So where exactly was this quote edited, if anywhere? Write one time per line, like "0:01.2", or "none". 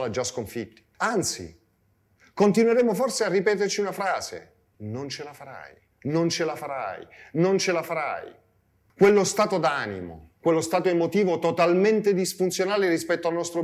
0:08.9
0:10.4